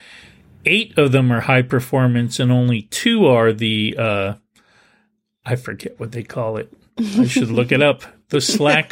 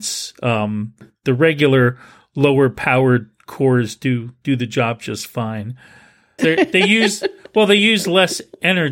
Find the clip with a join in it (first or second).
second